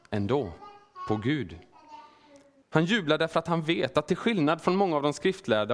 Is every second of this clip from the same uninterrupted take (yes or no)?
no